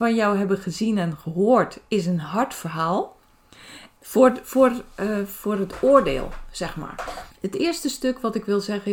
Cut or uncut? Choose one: cut